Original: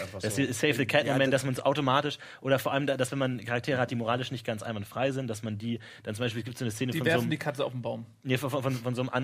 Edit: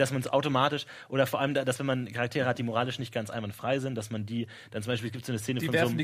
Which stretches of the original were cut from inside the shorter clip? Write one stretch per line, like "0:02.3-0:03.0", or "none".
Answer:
none